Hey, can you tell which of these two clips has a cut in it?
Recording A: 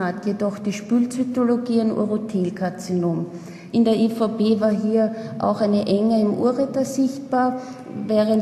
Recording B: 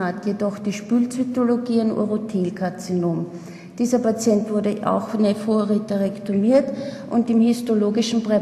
A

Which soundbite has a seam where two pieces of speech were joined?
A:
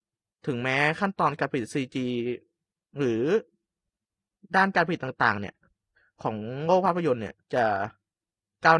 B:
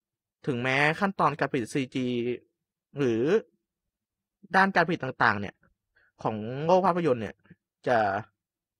A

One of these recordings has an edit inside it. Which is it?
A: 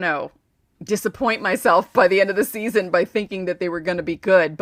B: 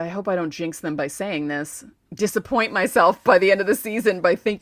B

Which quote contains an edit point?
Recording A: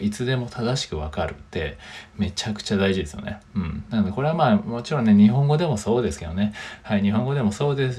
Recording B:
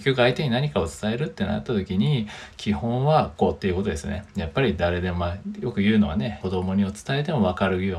B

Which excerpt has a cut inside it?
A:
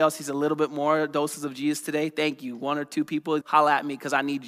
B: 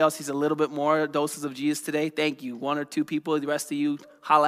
A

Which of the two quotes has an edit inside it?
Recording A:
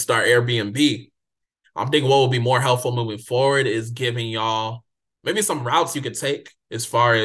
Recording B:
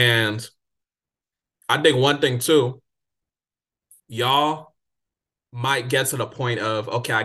A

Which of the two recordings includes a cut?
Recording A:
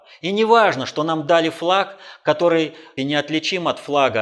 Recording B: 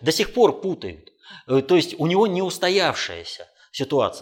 A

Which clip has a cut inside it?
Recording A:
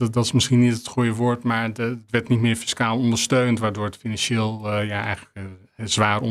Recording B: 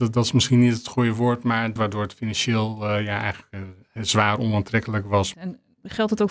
B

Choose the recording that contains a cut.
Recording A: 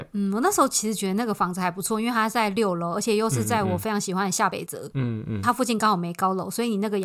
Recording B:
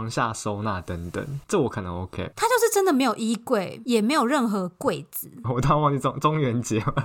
B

